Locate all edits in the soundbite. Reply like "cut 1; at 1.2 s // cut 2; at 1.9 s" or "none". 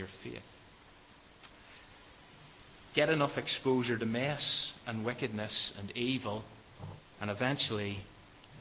cut 1; at 7.1 s